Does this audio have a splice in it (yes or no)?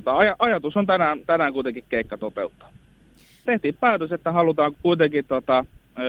yes